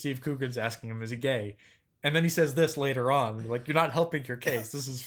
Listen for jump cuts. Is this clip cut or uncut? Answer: uncut